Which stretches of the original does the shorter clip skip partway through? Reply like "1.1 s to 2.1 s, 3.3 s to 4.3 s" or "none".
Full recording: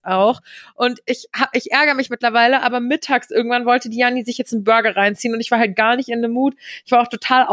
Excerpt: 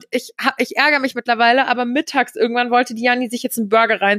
none